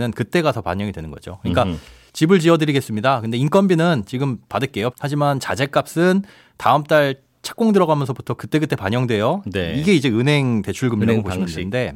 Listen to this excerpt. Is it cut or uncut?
cut